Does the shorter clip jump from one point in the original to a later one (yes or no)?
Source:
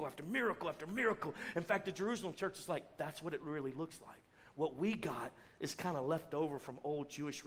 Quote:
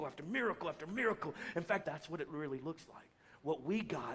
yes